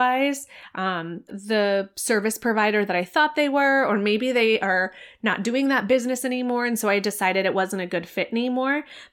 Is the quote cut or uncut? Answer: cut